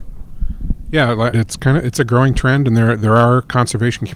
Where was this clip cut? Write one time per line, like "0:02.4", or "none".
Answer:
0:01.3